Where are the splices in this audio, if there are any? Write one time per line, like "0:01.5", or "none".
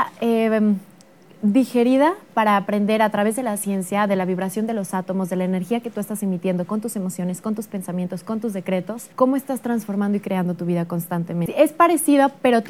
0:09.1
0:11.5

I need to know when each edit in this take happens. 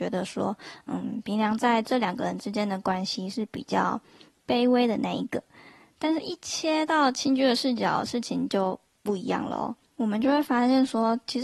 none

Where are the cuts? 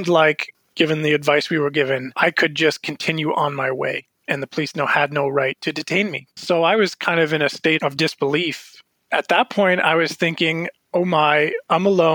0:06.4

